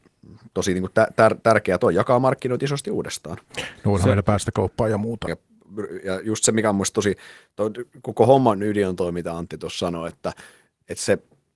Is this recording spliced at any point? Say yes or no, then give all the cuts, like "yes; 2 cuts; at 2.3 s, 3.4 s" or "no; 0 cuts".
yes; 1 cut; at 5.3 s